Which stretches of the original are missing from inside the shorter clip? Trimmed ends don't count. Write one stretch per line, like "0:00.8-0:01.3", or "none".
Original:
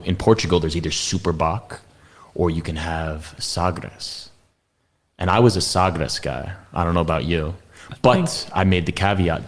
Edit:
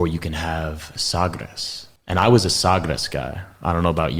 0:04.4-0:05.1